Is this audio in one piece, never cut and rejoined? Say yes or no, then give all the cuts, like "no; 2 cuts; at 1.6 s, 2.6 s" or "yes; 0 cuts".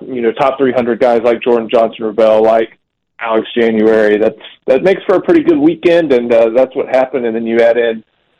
yes; 0 cuts